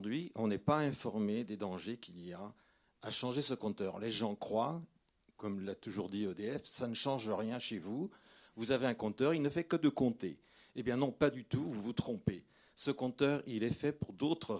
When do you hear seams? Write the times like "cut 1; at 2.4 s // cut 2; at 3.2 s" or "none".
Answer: none